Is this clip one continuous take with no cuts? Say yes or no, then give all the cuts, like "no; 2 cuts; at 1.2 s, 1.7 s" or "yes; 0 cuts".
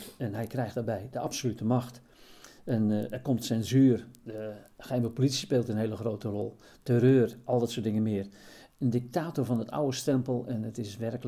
yes; 0 cuts